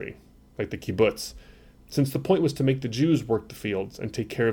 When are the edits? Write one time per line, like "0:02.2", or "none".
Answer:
0:01.7